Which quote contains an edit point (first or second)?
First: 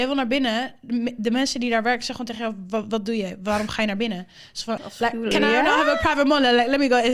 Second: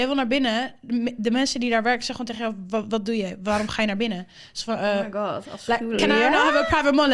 first